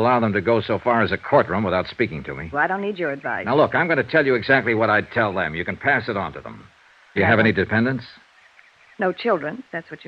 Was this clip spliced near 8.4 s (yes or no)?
no